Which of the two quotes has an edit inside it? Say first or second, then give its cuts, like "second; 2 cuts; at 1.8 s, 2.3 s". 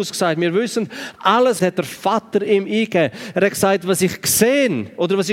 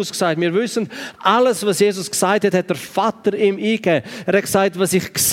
first; 1 cut; at 1.6 s